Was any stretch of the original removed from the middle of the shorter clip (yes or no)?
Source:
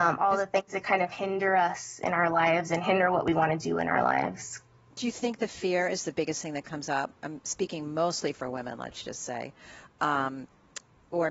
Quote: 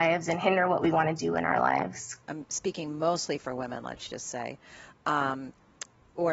yes